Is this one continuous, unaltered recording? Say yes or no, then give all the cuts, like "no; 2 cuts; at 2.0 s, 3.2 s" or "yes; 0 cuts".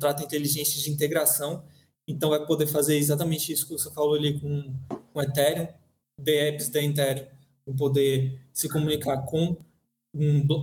yes; 0 cuts